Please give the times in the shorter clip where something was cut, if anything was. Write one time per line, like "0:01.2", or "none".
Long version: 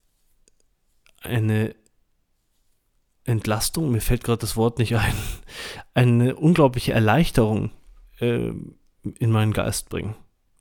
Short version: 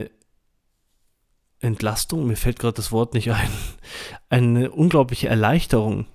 none